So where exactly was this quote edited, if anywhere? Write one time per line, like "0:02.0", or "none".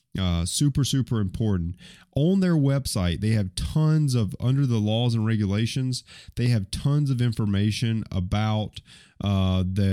none